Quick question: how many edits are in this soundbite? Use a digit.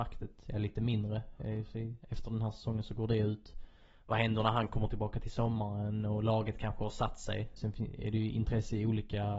1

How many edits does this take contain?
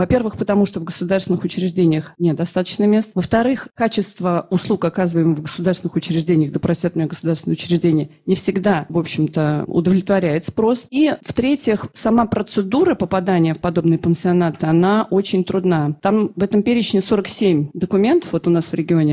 0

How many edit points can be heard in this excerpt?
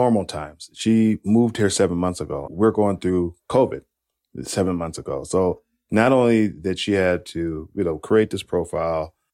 1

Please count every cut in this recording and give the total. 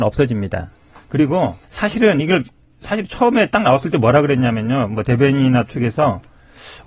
1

